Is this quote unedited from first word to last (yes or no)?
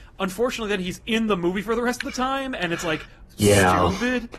yes